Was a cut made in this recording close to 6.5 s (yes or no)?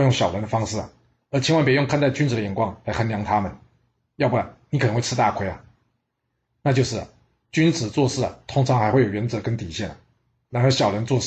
yes